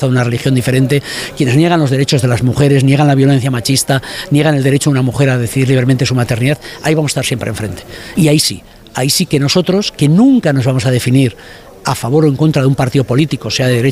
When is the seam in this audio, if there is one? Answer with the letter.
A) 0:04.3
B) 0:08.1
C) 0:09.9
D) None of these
B